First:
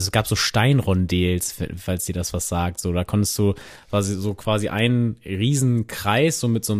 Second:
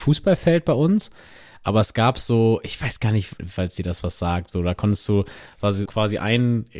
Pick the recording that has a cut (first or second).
second